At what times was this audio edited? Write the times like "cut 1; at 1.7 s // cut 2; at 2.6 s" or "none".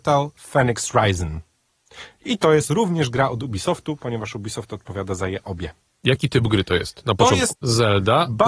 cut 1; at 7.5 s